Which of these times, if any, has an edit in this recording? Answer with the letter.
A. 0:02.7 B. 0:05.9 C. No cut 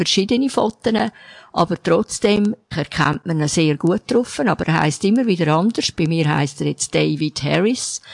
A